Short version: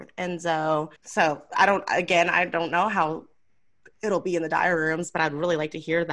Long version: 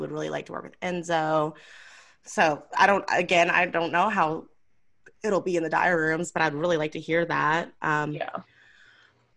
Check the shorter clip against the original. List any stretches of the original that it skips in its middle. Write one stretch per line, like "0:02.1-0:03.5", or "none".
0:01.6-0:02.2